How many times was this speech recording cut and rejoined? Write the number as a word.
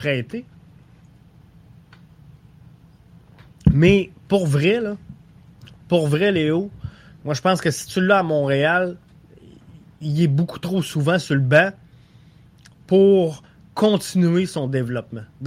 zero